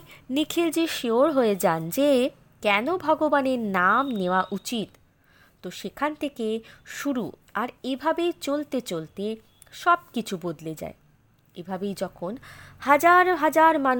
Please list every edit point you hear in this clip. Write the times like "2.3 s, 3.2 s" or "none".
none